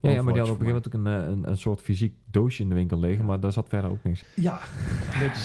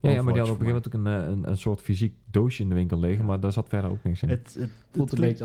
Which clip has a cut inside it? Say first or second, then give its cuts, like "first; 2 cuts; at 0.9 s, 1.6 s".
first; 1 cut; at 4.2 s